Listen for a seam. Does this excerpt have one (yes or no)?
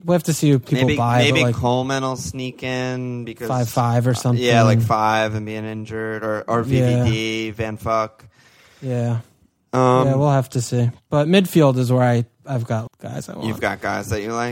yes